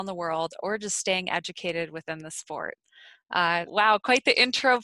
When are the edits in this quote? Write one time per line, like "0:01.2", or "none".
0:03.7